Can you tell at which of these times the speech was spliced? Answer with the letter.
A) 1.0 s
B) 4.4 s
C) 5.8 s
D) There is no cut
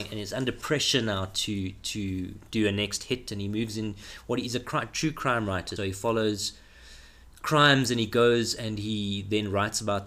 C